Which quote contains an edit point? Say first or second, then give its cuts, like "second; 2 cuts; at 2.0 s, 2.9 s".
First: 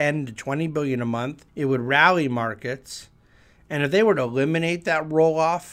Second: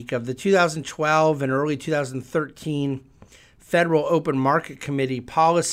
first; 1 cut; at 1.5 s